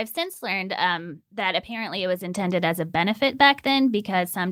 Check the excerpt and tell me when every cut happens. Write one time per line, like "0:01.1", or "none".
0:01.2